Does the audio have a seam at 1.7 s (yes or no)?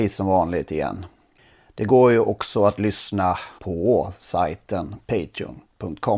no